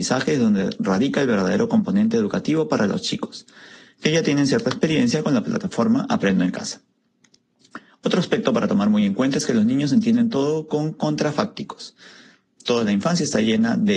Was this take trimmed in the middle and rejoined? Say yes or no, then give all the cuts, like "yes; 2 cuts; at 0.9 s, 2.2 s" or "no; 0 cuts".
no; 0 cuts